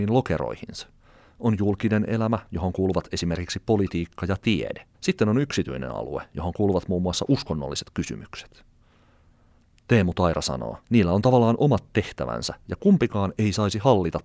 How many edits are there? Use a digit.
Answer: 2